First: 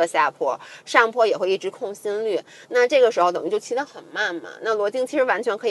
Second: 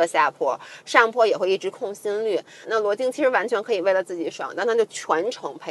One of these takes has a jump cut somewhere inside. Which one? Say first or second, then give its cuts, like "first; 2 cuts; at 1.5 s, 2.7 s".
second; 1 cut; at 2.6 s